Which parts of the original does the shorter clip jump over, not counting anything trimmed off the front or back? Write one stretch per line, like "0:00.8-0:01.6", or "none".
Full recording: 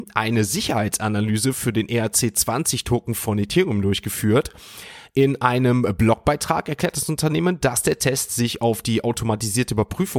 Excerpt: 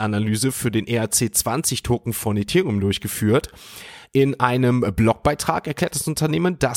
none